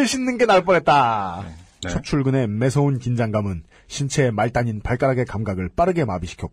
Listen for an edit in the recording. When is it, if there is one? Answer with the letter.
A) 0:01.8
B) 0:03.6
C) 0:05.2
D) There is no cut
A